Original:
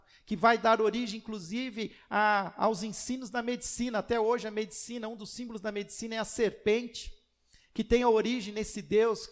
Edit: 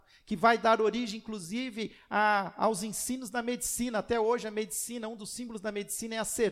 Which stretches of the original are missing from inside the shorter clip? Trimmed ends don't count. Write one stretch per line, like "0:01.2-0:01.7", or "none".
none